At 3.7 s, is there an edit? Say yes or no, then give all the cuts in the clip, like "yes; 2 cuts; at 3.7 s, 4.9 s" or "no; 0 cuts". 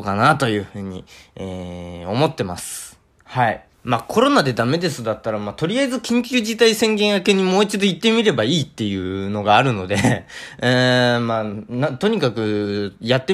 yes; 1 cut; at 3.7 s